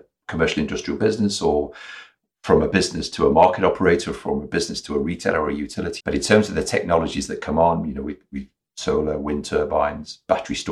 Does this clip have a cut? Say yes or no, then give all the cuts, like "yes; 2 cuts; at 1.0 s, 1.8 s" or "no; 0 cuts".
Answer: yes; 1 cut; at 6.0 s